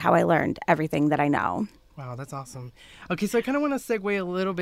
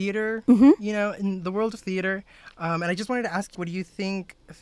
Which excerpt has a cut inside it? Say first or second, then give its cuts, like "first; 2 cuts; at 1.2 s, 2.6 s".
second; 1 cut; at 3.5 s